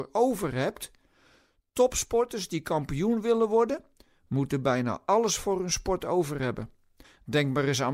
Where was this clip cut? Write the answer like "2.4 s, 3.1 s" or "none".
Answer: 7.0 s